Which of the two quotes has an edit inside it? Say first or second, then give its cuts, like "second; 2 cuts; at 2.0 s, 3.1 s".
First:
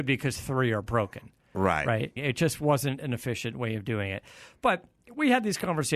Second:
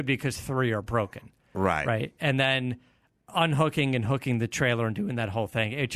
first; 1 cut; at 2.2 s